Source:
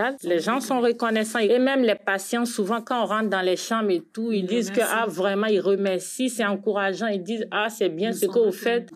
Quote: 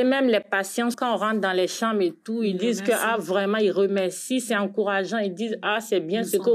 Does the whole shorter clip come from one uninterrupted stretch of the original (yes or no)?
no